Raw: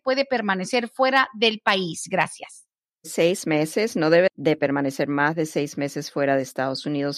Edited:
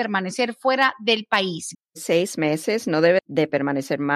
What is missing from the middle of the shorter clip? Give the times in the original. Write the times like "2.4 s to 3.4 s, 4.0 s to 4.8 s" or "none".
2.1 s to 2.8 s